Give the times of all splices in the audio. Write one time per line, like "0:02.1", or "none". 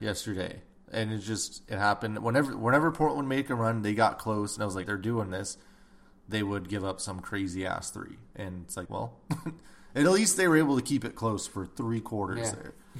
0:04.8
0:08.9